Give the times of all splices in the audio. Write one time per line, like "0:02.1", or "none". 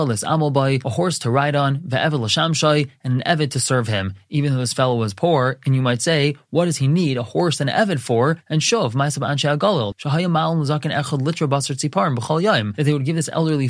0:08.4
0:09.9